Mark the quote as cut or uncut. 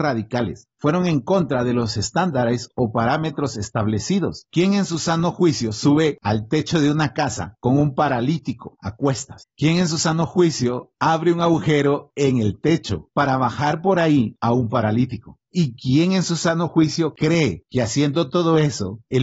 uncut